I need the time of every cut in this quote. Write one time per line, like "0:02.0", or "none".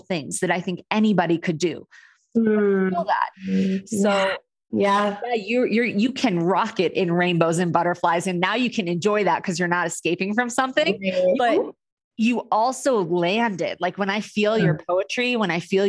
0:03.3
0:04.7
0:11.3